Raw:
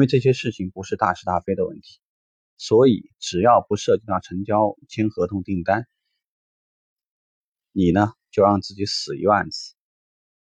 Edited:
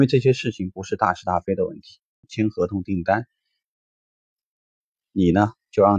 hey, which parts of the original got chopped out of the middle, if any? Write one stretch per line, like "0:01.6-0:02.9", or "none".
0:02.2-0:04.8